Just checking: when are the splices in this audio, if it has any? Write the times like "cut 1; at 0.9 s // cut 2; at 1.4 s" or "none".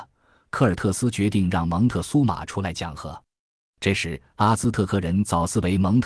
none